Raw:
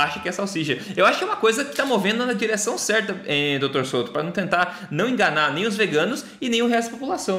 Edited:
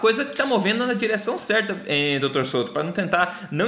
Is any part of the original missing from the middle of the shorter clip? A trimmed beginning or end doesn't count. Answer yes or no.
no